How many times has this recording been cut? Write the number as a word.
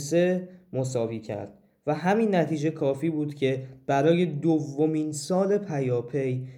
zero